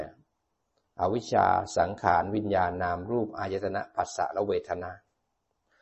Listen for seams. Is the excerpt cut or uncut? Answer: uncut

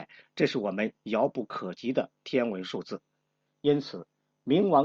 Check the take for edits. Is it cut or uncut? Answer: cut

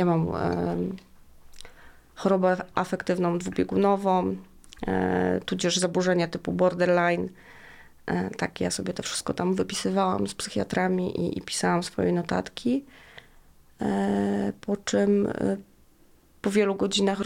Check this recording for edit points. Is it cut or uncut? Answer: uncut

